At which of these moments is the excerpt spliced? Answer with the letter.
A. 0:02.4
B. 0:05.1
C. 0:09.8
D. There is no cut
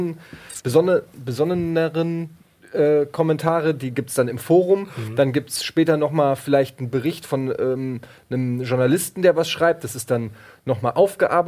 D